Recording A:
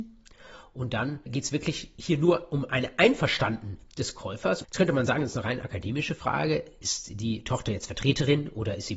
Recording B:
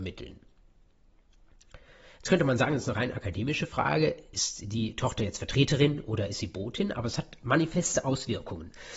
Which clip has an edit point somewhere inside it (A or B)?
A